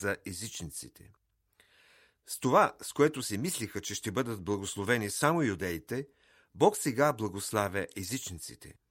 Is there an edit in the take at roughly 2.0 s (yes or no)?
no